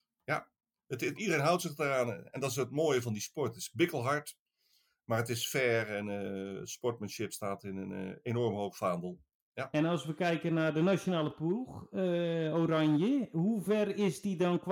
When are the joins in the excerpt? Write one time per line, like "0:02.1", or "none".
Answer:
0:01.2